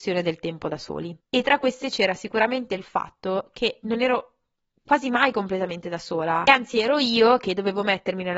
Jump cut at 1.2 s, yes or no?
yes